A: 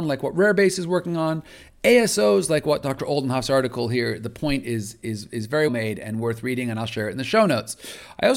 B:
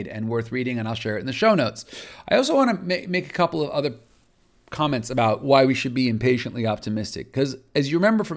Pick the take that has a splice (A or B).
A